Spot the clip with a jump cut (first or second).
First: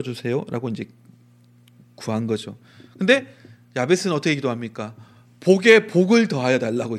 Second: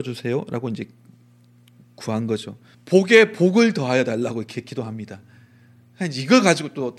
second